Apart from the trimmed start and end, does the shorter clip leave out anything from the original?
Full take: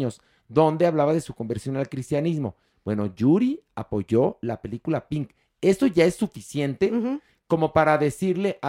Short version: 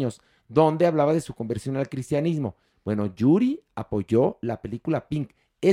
no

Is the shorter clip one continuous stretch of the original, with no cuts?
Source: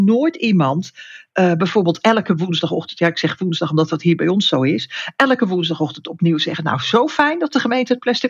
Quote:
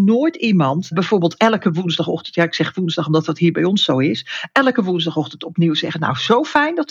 no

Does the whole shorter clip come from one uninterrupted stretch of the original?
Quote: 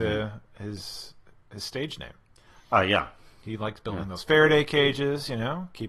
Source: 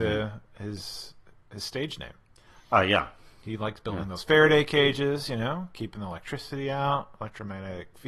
yes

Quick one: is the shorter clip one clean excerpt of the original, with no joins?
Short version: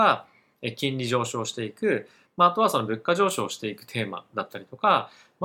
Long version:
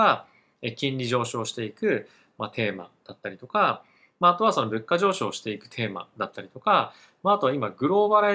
no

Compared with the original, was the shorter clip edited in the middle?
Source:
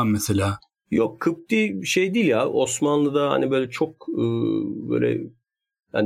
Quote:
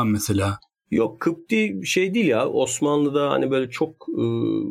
no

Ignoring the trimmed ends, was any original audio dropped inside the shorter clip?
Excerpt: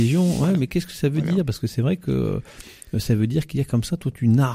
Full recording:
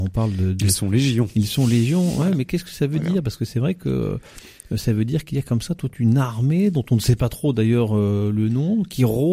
no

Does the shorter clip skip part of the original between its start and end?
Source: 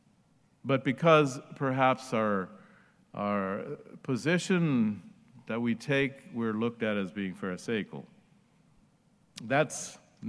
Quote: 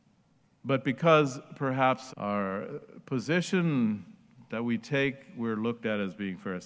yes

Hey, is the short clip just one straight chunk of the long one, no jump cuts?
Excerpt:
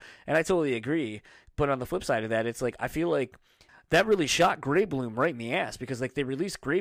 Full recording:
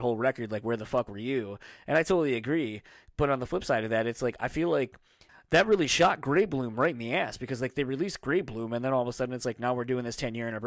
yes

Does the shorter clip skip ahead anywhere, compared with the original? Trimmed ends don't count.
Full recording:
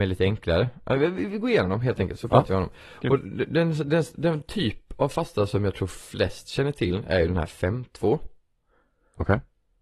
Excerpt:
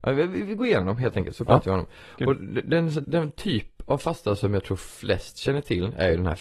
yes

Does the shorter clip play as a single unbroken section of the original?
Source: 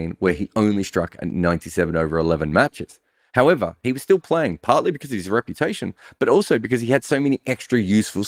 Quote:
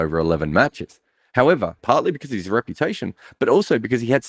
no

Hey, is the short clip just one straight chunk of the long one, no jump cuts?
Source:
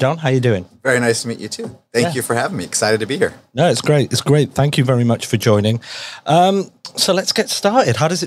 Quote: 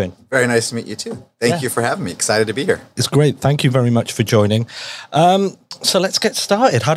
no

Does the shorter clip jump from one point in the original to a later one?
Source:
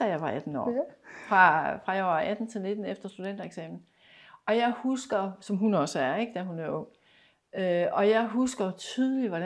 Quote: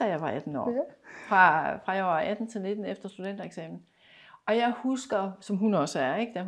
no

